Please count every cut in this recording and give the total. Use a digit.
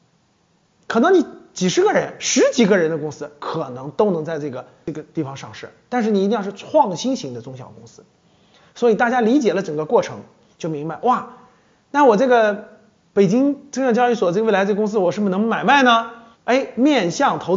1